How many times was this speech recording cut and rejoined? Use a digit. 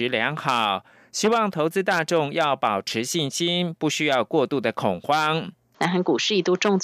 1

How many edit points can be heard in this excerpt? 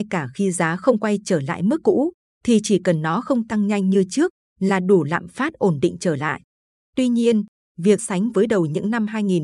1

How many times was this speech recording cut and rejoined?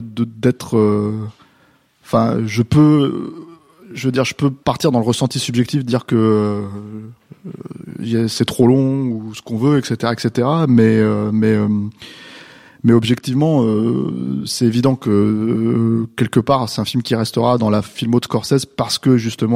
1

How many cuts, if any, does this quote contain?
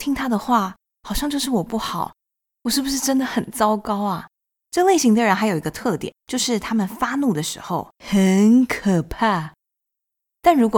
3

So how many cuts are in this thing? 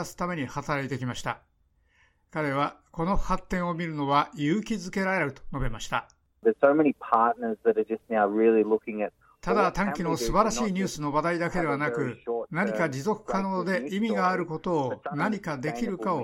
0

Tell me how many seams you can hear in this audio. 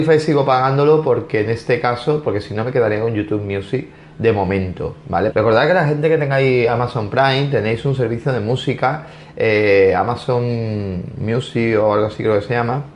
1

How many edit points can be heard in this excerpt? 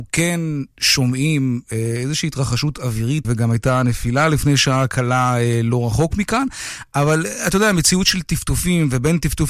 1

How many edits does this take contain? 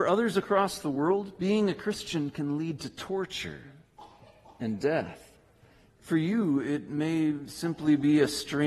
1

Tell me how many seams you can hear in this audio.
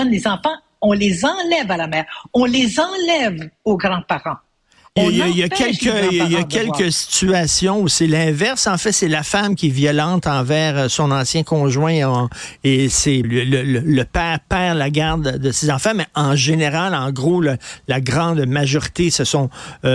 1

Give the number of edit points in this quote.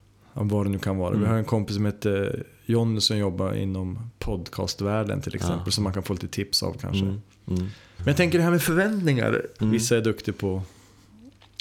2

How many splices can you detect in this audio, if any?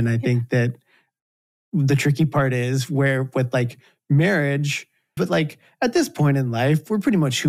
1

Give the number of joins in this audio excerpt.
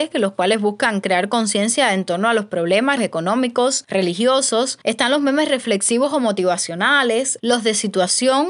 2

